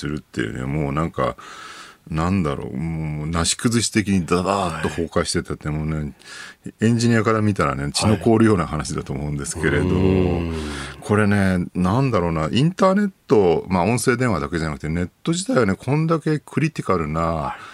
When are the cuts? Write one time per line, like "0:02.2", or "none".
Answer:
0:11.7